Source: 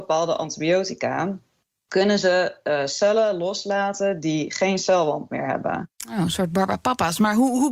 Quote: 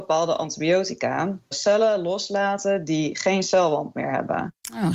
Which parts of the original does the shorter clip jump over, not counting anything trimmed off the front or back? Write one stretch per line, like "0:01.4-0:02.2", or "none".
0:01.5-0:02.9